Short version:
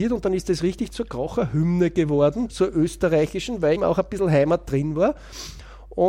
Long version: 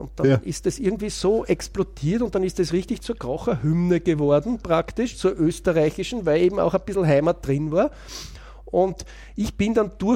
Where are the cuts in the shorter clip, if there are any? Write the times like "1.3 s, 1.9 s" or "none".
2.5 s, 3.8 s